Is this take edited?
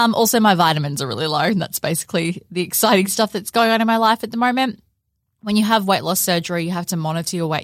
no; 0 cuts

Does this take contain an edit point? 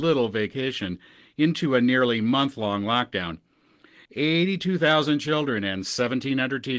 yes; 1 cut; at 4.0 s

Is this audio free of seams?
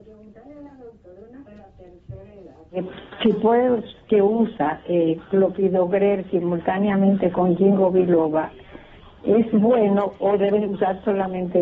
yes; 0 cuts

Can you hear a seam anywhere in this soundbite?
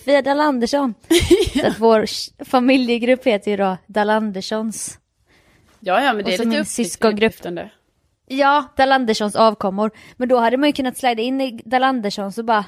no; 0 cuts

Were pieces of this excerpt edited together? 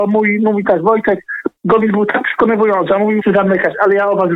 yes; 2 cuts; at 1.6 s, 3.2 s

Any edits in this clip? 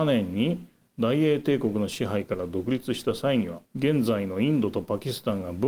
yes; 1 cut; at 3.6 s

